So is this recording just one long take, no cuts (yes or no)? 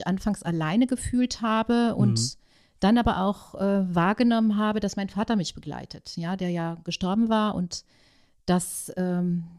yes